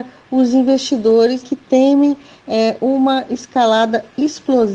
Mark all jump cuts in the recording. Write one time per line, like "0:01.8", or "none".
0:01.4